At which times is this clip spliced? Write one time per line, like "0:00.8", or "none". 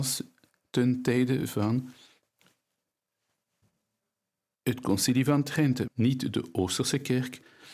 0:05.8